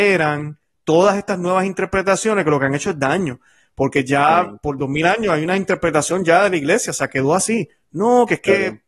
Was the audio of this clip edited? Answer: no; 0 cuts

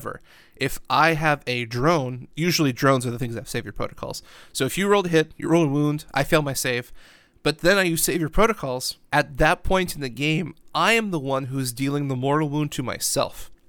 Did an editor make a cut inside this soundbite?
no; 0 cuts

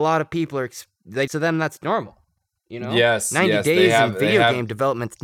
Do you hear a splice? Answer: yes; 1 cut; at 1.3 s

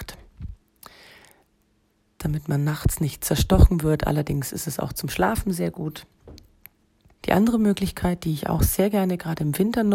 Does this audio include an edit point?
yes; 1 cut; at 7.2 s

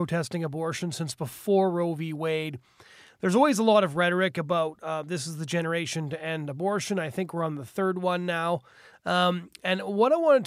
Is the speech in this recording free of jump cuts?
yes; 0 cuts

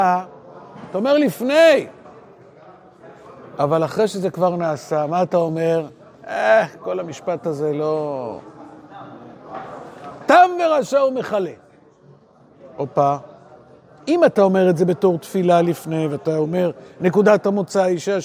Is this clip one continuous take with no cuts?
yes; 0 cuts

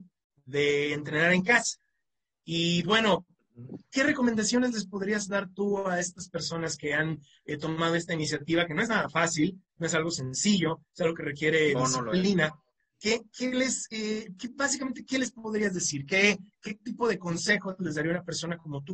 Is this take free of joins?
no; 1 cut; at 2.8 s

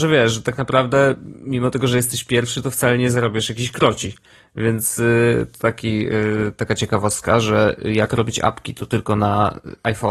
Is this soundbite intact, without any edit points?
yes; 0 cuts

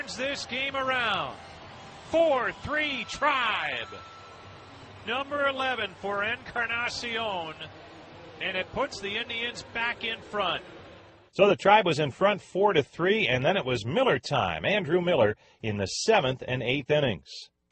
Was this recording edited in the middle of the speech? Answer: no; 0 cuts

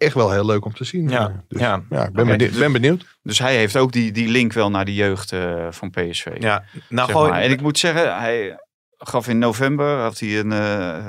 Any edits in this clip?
no; 0 cuts

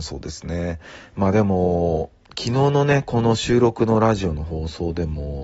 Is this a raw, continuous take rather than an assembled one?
no; 1 cut; at 1.1 s

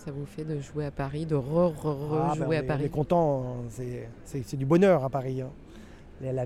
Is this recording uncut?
yes; 0 cuts

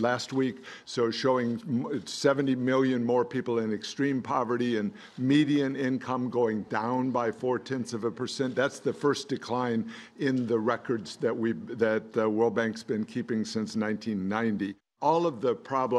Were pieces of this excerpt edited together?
no; 0 cuts

